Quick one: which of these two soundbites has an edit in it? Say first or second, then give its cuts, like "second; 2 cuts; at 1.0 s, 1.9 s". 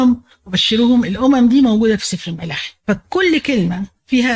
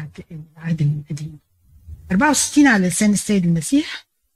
first; 1 cut; at 2.8 s